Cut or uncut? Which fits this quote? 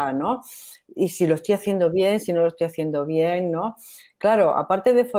uncut